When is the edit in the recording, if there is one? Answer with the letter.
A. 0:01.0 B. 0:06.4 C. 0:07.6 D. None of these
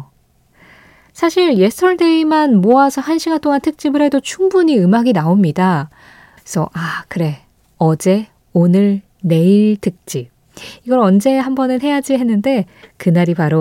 B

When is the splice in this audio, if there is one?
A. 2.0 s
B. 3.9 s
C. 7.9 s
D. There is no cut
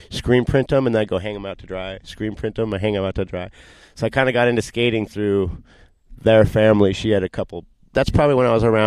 C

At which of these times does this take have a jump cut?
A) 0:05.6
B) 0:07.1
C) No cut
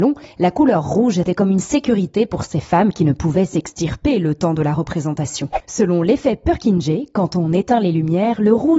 A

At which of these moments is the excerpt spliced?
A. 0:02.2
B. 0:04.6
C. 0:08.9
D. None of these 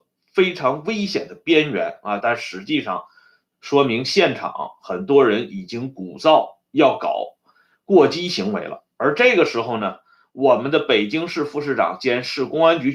A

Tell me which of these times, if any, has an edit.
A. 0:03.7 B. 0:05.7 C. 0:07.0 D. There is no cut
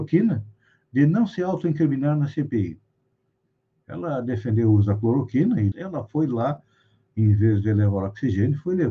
B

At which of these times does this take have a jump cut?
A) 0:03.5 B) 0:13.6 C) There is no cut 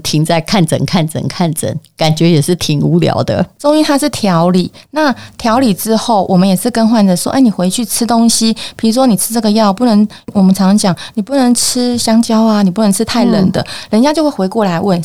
C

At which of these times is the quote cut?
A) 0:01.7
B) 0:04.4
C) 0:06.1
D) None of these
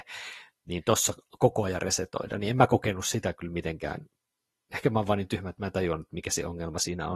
D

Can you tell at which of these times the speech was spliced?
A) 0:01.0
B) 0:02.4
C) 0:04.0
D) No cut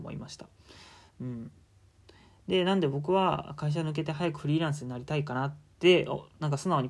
D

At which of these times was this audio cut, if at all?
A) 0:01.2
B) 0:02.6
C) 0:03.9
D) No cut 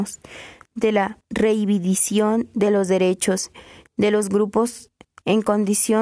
A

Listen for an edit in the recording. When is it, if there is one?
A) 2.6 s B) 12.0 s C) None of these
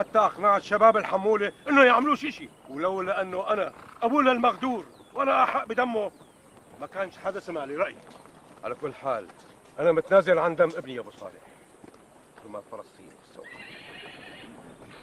A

